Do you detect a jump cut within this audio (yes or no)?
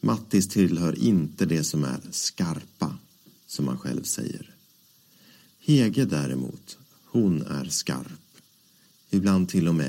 no